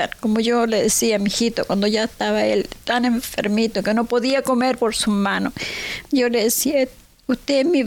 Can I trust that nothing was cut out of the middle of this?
yes; 0 cuts

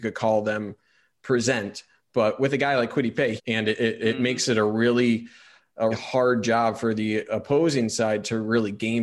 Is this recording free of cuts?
no; 2 cuts; at 3.4 s, 5.9 s

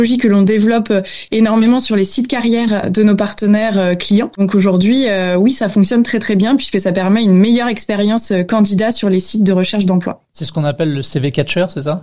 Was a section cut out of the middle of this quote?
no; 0 cuts

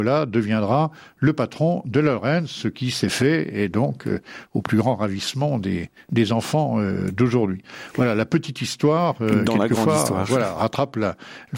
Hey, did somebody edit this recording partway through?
no; 0 cuts

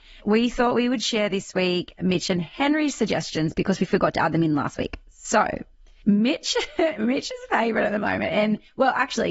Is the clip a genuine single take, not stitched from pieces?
yes; 0 cuts

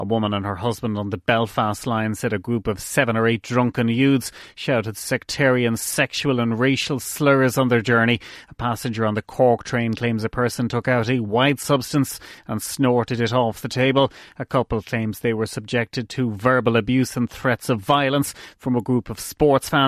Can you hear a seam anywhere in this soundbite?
no; 0 cuts

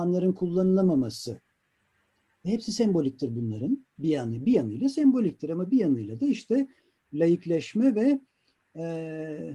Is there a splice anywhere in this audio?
yes; 1 cut; at 4.0 s

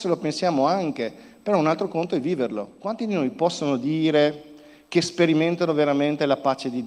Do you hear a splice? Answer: no; 0 cuts

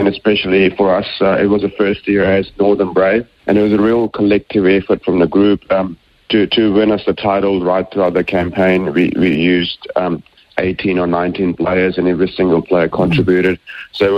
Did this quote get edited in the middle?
yes; 1 cut; at 3.4 s

